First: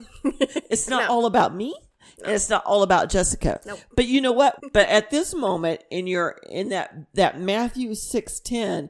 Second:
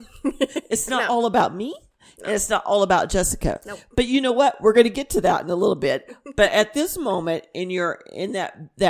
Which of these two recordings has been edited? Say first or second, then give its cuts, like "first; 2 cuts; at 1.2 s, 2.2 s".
first; 1 cut; at 4.6 s